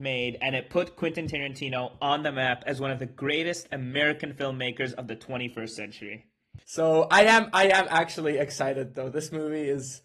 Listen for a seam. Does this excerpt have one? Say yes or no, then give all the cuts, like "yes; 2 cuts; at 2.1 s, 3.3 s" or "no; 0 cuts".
yes; 1 cut; at 6.6 s